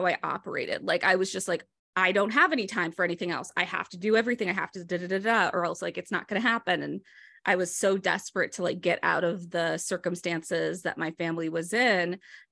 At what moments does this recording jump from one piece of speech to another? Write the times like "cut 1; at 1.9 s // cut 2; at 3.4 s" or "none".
none